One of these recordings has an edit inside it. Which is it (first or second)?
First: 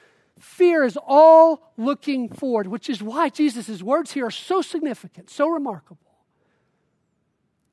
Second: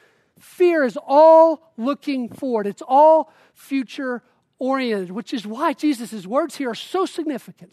first